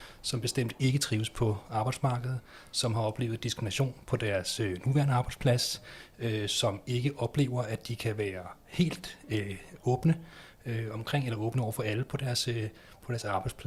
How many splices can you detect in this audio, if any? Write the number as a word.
zero